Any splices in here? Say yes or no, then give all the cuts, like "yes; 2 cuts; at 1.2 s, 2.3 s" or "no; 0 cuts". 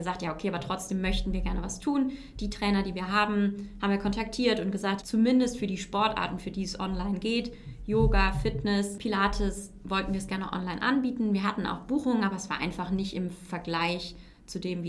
yes; 1 cut; at 5.0 s